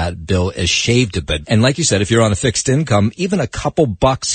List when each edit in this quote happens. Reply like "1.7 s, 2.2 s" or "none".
1.4 s